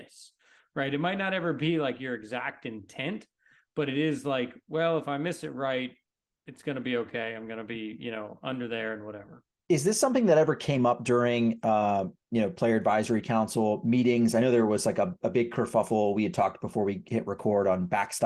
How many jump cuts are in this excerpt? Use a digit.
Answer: 0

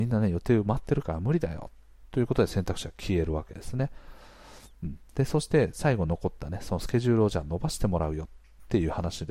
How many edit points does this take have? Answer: 0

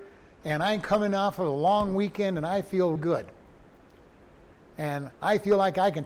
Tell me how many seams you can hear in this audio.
1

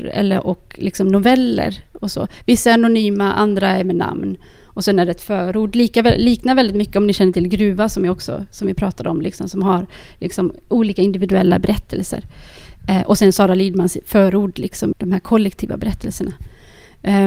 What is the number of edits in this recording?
1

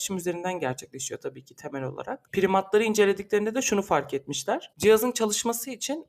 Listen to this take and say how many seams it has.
1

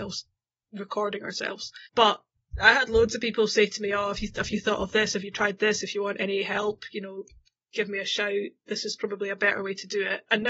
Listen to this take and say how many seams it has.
1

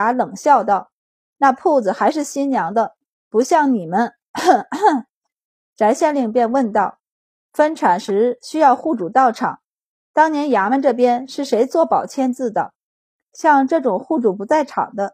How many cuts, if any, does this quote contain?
1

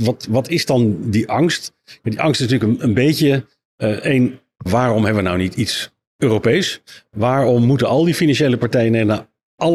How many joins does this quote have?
1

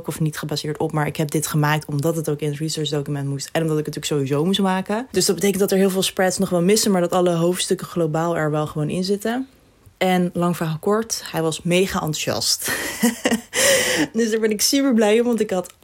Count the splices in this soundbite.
0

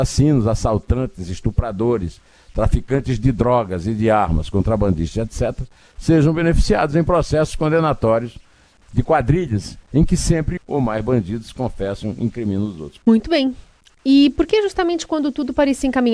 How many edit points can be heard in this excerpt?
2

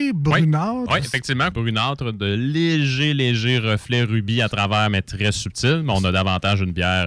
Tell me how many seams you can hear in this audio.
1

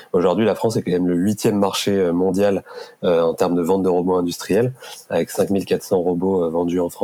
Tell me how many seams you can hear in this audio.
0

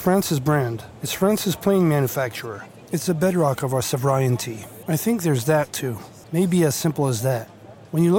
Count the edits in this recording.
2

